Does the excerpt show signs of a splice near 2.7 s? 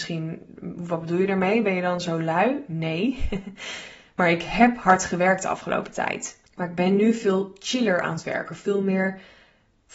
no; 1 cut; at 6.5 s

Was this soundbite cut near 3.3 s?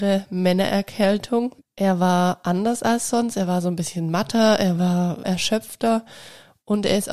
no; 2 cuts; at 1.6 s, 5.2 s

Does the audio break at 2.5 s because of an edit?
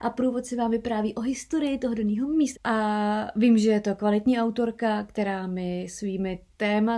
yes; 1 cut; at 2.5 s

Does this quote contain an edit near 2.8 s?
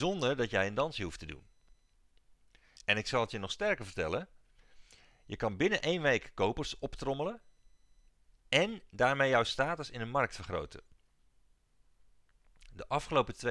yes; 1 cut; at 2.8 s

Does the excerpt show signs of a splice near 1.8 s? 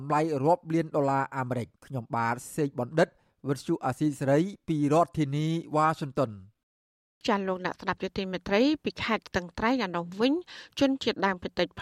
yes; 1 cut; at 1.8 s

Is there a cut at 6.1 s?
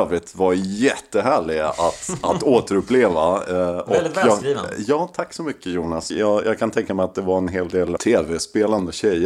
yes; 2 cuts; at 6.1 s, 8.0 s

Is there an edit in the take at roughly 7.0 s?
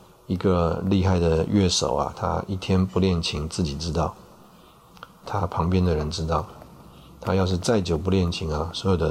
no; 1 cut; at 5.2 s

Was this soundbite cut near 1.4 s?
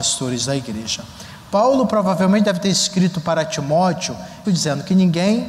no; 1 cut; at 4.4 s

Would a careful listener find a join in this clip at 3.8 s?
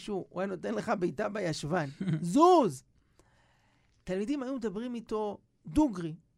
no; 0 cuts

